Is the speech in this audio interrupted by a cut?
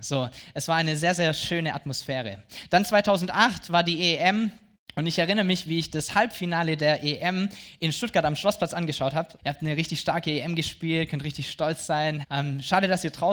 yes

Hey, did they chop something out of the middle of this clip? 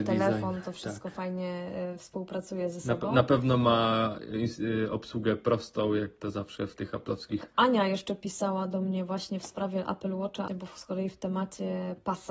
yes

